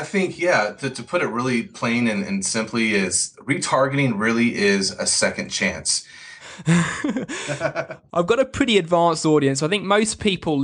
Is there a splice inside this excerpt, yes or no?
yes